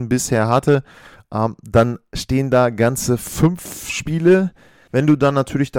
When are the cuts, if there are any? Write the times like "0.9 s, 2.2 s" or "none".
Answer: 4.9 s